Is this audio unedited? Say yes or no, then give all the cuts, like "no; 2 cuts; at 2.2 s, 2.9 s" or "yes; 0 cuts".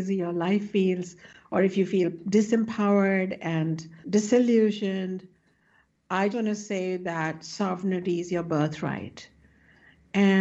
no; 2 cuts; at 4.0 s, 6.3 s